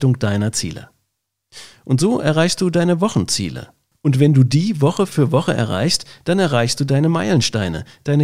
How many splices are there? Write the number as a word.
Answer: zero